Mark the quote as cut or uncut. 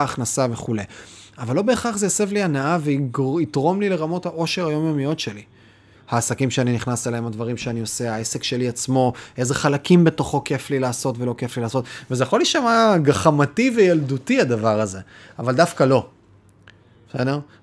cut